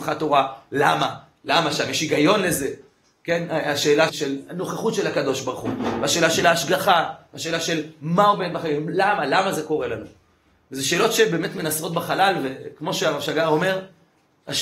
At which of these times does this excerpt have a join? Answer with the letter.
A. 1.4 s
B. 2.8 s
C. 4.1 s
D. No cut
C